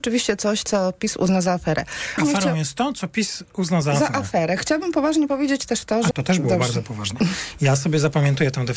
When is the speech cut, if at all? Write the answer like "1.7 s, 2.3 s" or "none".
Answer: 2.2 s, 6.1 s

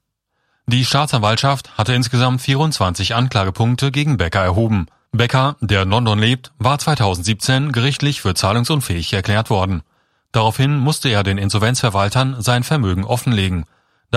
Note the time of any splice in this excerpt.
5.1 s

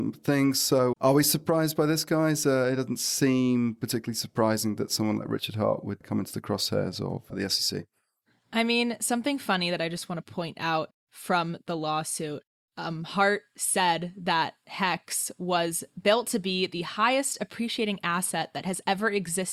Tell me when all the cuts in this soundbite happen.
0.9 s

